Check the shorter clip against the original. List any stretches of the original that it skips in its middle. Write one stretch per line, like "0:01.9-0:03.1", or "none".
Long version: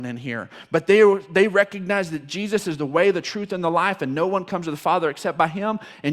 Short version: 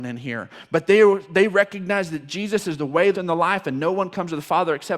0:03.1-0:03.5